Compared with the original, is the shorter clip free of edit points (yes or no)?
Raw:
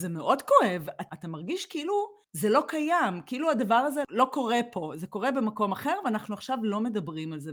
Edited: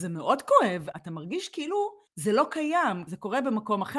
no